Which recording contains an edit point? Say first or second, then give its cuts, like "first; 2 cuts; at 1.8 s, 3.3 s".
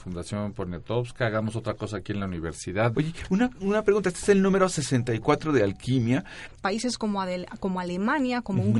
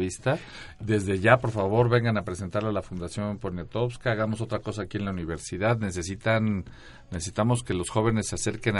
first; 2 cuts; at 2.9 s, 6.5 s